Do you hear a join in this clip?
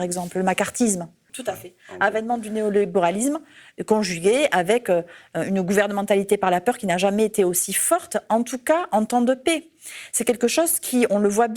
yes; 1 cut; at 1.3 s

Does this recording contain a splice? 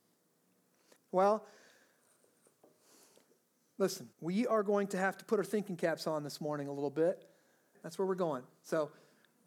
yes; 3 cuts; at 1.0 s, 4.1 s, 7.7 s

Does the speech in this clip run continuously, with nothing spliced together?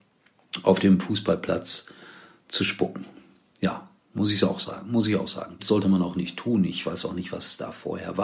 no; 1 cut; at 5.6 s

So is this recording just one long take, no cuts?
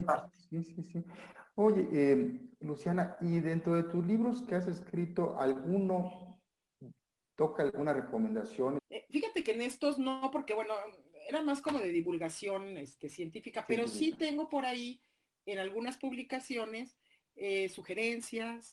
no; 1 cut; at 8.8 s

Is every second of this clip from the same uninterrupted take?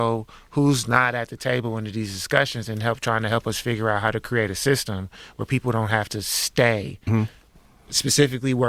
no; 1 cut; at 7.1 s

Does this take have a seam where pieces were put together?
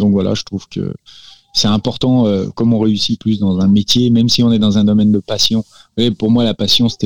no; 0 cuts

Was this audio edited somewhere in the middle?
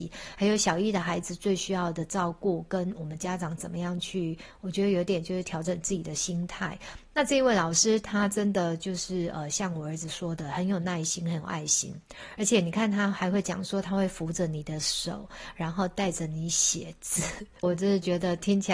yes; 1 cut; at 17.6 s

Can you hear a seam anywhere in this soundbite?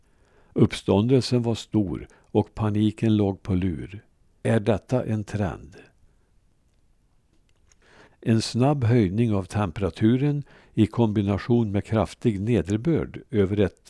yes; 2 cuts; at 4.4 s, 8.1 s

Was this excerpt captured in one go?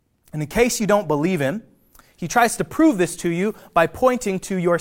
yes; 0 cuts

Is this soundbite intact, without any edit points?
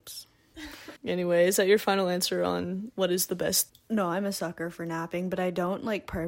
no; 2 cuts; at 1.0 s, 3.7 s

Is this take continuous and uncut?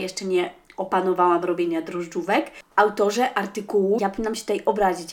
no; 1 cut; at 4.0 s

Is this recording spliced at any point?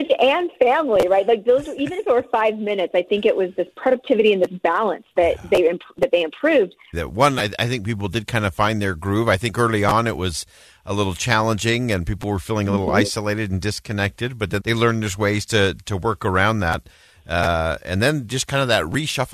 yes; 2 cuts; at 6.9 s, 14.6 s

